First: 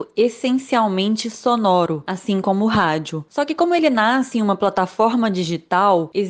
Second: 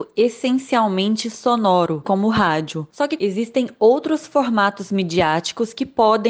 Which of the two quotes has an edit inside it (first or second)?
second